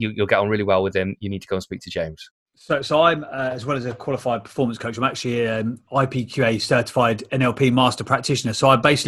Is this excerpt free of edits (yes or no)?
yes